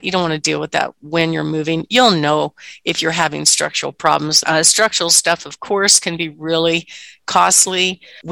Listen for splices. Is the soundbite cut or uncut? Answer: cut